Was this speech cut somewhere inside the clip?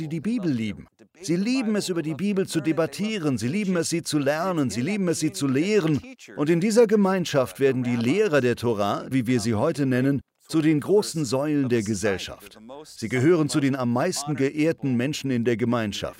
yes; 1 cut; at 9.1 s

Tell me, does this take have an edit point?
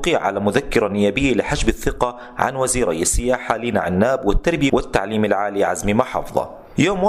yes; 1 cut; at 4.7 s

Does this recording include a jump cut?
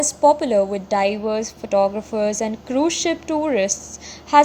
no; 0 cuts

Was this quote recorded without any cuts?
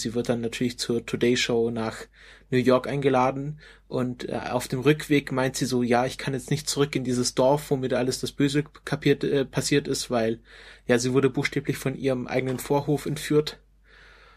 yes; 0 cuts

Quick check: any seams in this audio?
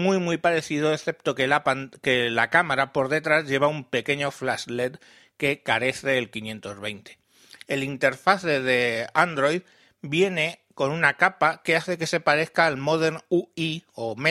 yes; 1 cut; at 7.6 s

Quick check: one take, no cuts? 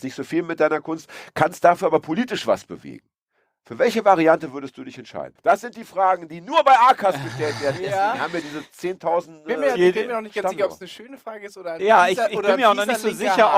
no; 1 cut; at 5.4 s

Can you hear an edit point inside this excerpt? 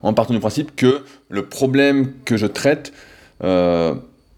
no; 0 cuts

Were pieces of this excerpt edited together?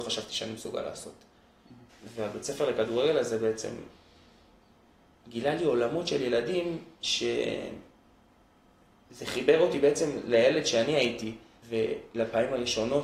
yes; 2 cuts; at 1.9 s, 11.6 s

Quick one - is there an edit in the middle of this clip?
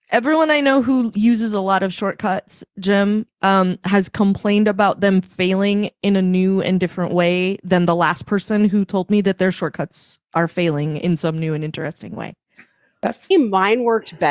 yes; 1 cut; at 13.3 s

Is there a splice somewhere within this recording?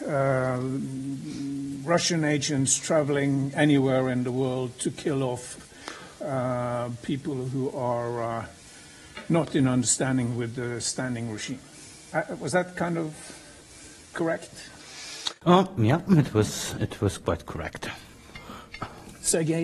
no; 0 cuts

